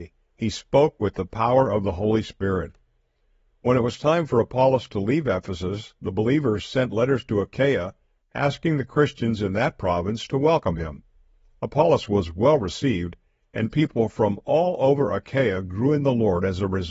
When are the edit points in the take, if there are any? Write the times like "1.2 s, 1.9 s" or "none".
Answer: none